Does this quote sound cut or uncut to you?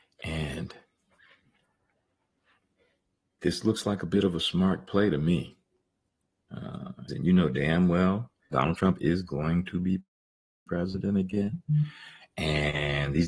cut